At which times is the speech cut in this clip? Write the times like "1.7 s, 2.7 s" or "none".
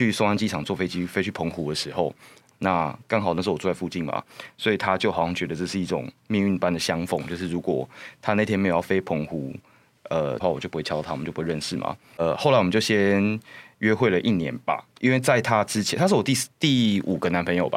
10.4 s